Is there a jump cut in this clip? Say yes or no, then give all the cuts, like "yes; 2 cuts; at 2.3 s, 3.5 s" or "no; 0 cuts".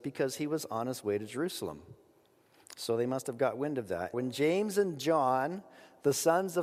yes; 1 cut; at 4.1 s